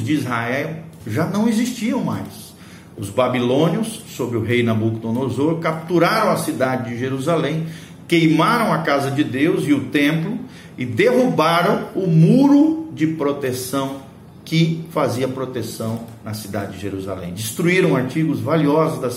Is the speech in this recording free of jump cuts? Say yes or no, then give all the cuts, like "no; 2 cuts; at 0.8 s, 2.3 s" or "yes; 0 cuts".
yes; 0 cuts